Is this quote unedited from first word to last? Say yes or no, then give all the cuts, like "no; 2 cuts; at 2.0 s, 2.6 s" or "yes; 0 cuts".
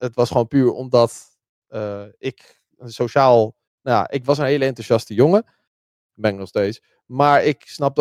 yes; 0 cuts